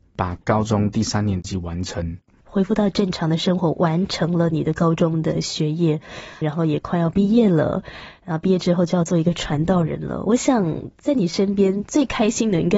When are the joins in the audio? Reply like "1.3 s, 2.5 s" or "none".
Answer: 2.4 s, 6.4 s

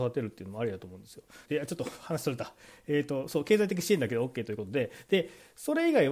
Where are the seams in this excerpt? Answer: 1.4 s

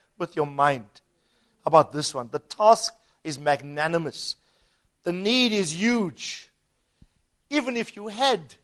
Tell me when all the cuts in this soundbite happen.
none

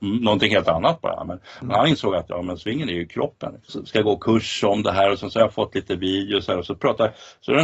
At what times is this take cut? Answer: 3.7 s

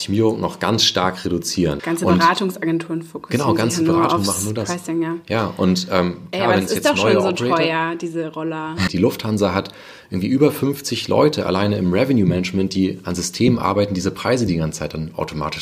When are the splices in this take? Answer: 1.8 s, 8.9 s

